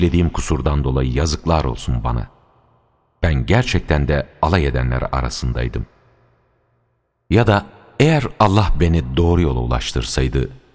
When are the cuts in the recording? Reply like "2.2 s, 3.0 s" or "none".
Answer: none